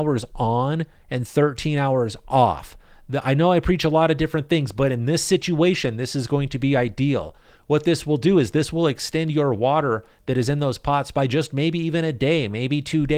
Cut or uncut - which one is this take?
uncut